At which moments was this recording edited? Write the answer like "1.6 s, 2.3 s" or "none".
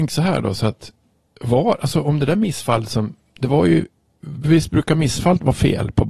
none

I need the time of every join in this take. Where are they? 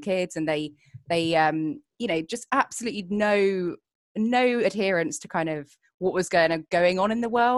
none

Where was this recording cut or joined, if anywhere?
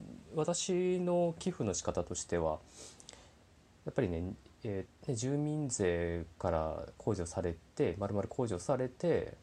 4.9 s

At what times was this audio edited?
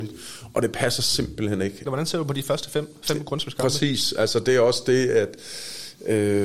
1.9 s

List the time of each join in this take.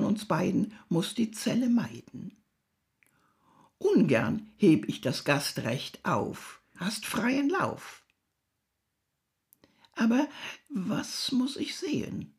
6.8 s

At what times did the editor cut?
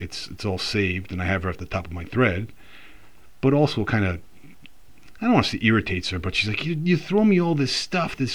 none

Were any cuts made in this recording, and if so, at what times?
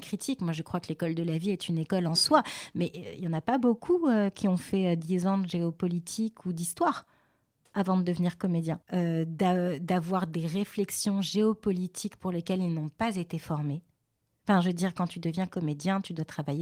8.8 s

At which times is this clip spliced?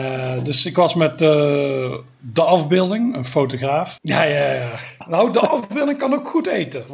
4.0 s

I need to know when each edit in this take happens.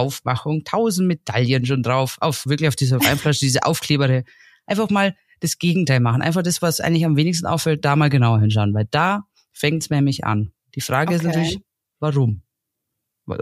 2.5 s

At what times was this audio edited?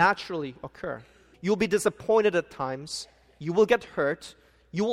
1.3 s

